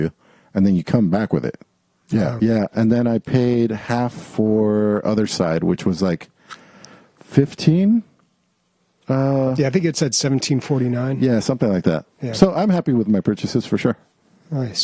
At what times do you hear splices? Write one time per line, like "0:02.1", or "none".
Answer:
0:02.4

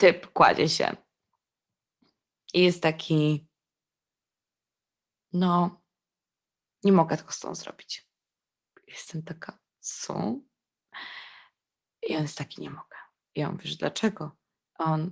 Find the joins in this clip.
0:09.7

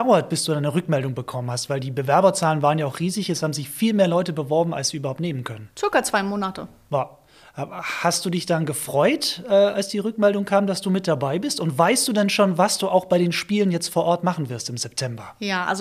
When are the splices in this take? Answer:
none

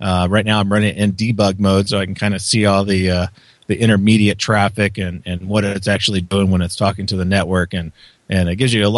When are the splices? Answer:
none

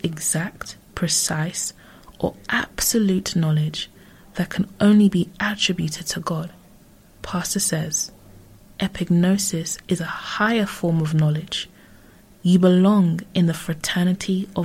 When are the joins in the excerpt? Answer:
0:07.2
0:12.3

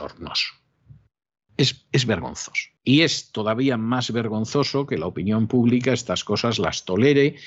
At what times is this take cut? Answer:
0:01.5
0:02.8

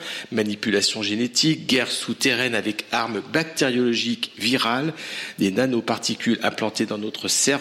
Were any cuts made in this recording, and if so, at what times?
0:04.3

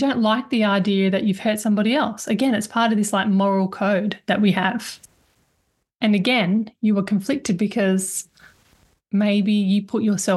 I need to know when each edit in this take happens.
none

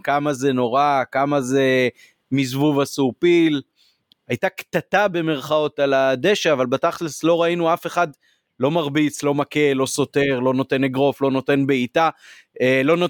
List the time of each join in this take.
0:04.1

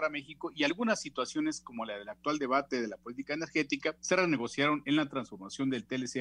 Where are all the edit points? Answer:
0:04.0

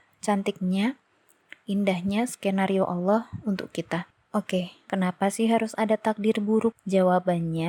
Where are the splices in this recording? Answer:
0:04.9

